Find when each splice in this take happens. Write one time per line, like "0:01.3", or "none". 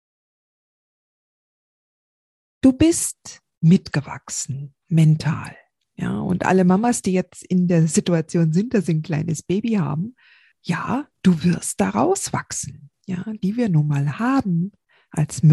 0:13.4